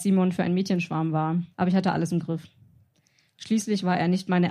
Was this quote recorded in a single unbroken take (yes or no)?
no